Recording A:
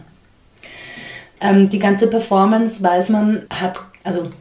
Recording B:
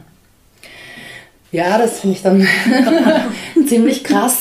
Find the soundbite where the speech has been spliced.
A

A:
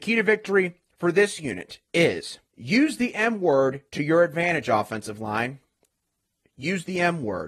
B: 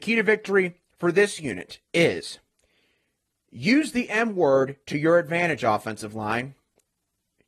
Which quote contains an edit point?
A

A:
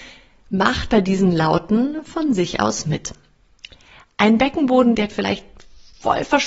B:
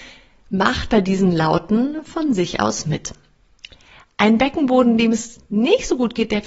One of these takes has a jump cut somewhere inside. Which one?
A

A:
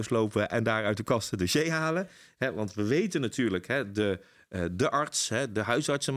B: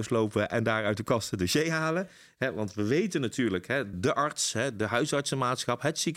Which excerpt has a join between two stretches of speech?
B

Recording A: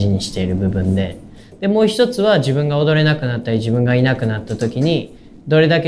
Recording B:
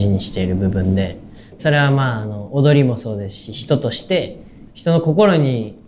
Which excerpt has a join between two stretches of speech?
B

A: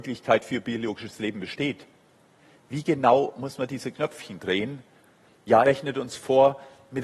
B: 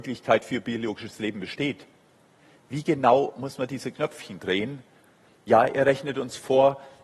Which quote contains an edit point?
A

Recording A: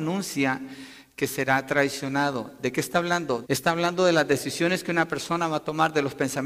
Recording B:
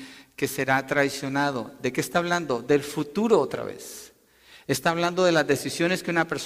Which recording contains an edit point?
A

